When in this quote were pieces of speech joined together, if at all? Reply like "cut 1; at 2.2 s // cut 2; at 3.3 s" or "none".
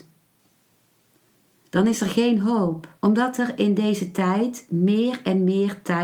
cut 1; at 3.0 s

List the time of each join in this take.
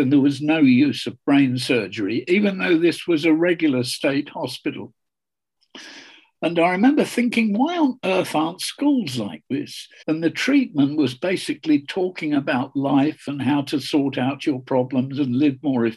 cut 1; at 10.0 s

